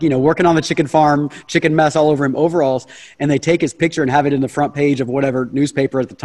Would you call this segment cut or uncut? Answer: uncut